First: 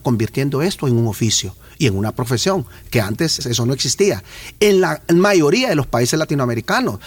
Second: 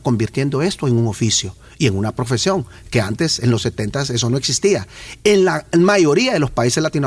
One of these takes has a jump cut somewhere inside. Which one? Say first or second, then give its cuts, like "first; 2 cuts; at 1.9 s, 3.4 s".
first; 1 cut; at 3.4 s